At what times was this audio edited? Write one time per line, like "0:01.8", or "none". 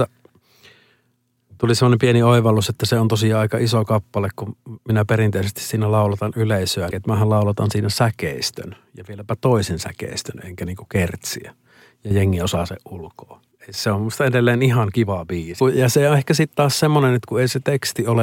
0:06.9
0:13.5
0:15.6